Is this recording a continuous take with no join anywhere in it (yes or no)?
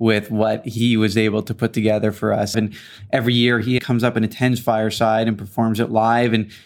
no